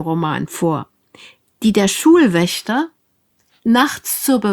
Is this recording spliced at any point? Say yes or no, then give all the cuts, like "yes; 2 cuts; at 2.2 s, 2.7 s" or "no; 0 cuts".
yes; 1 cut; at 3.5 s